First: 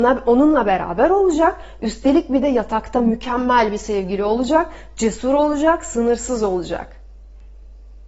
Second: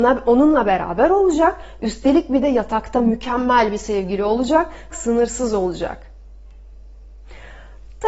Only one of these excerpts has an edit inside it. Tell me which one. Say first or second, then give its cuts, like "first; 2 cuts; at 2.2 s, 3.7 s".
second; 1 cut; at 4.9 s